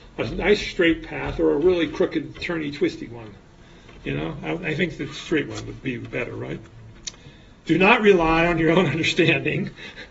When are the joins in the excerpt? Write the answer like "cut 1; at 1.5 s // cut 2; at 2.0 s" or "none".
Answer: cut 1; at 7.6 s